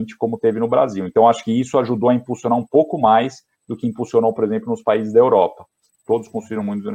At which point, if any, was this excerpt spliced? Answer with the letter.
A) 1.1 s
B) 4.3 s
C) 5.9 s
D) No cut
C